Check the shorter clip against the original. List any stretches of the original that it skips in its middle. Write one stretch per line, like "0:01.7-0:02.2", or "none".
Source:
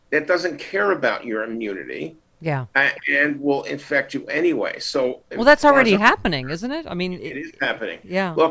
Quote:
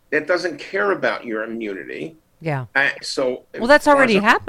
0:03.0-0:04.8